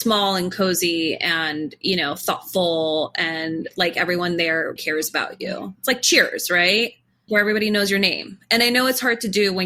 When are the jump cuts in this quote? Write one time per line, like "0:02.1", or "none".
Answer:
0:04.8
0:07.3